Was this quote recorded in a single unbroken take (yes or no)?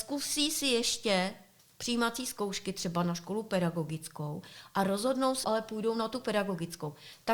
no